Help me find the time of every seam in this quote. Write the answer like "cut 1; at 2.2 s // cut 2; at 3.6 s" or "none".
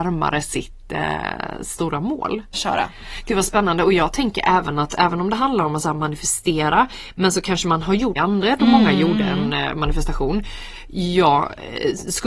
cut 1; at 2.5 s // cut 2; at 8.2 s